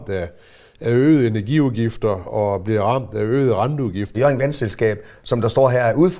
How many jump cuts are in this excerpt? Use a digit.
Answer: 1